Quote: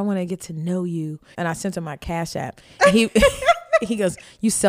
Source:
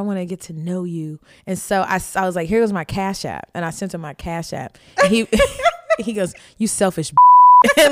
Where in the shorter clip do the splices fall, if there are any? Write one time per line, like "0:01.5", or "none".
0:01.3